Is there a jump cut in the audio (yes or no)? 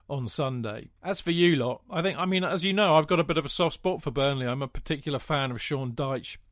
no